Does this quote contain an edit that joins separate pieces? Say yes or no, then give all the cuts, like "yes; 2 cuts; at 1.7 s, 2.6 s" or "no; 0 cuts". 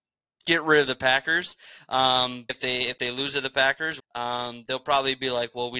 yes; 2 cuts; at 2.5 s, 4.0 s